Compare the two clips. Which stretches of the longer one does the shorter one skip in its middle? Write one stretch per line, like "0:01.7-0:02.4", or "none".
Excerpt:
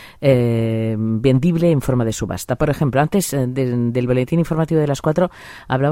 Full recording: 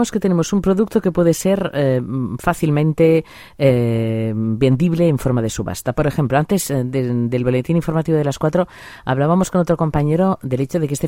none